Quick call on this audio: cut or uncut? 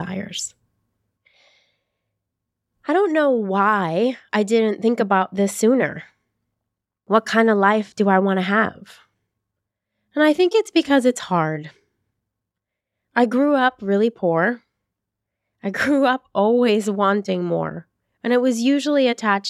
uncut